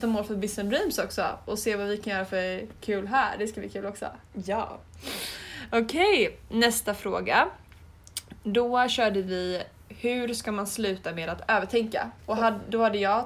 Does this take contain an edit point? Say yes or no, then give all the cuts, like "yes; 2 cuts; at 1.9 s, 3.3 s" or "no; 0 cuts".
yes; 1 cut; at 12.2 s